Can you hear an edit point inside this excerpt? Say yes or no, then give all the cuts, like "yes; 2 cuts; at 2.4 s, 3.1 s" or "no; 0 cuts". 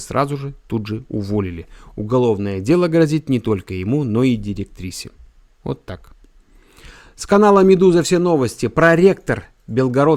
no; 0 cuts